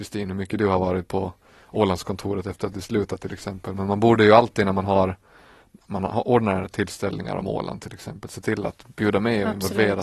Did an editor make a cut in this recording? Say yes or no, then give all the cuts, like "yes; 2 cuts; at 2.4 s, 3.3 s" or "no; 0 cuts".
no; 0 cuts